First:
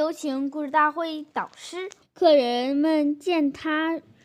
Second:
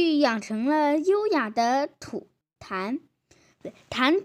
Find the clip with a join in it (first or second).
first